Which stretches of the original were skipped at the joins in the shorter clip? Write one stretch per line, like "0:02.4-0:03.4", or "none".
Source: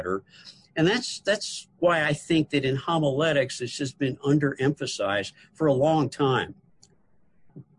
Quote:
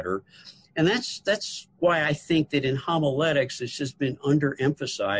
none